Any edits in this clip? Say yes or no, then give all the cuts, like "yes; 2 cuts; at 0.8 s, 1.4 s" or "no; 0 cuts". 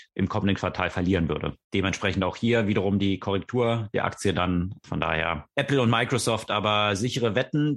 yes; 1 cut; at 4.8 s